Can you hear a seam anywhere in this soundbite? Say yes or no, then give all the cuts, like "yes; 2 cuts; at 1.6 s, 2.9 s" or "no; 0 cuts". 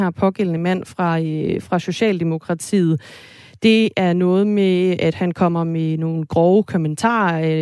no; 0 cuts